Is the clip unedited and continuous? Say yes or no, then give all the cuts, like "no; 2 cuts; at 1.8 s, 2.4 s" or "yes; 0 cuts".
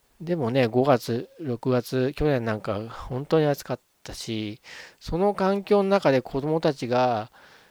yes; 0 cuts